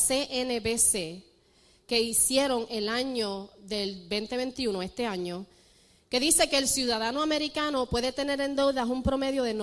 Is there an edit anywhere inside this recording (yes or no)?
no